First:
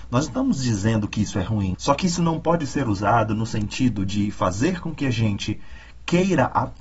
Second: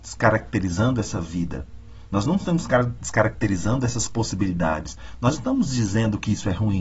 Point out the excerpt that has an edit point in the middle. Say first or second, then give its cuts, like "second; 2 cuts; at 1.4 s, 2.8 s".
first; 1 cut; at 1.7 s